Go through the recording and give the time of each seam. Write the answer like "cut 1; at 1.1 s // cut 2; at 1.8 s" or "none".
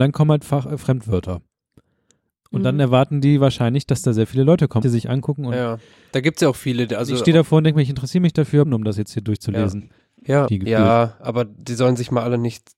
cut 1; at 4.8 s // cut 2; at 8.6 s // cut 3; at 10.5 s